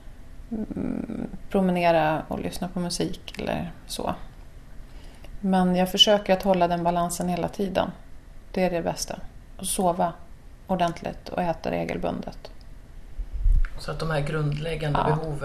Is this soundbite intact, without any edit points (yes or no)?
yes